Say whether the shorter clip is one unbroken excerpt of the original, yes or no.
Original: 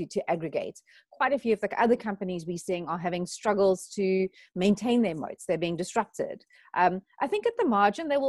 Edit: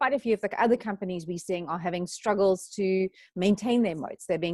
yes